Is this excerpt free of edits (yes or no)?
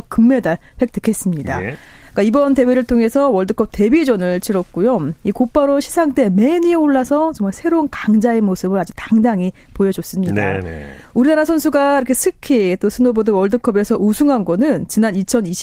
no